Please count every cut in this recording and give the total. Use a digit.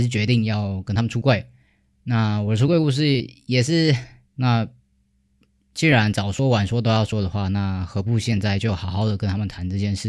1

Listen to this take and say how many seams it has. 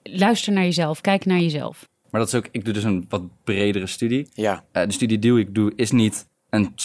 2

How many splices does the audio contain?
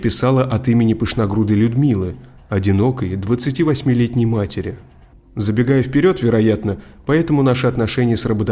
1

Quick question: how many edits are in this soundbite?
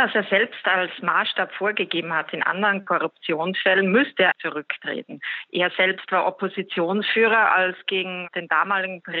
1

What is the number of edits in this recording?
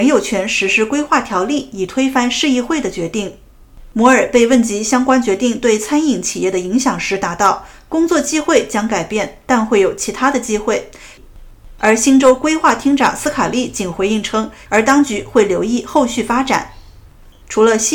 2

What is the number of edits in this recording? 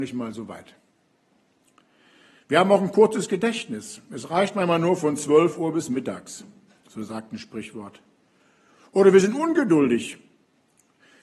0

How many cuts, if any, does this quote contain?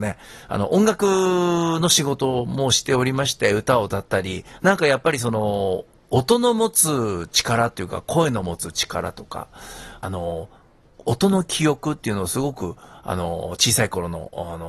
2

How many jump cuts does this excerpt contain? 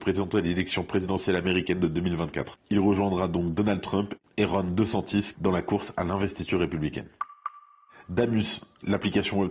1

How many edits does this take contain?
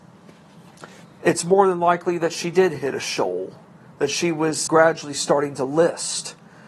2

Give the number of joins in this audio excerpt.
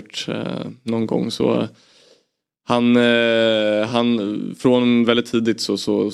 0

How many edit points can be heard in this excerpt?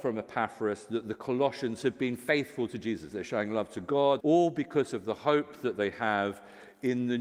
2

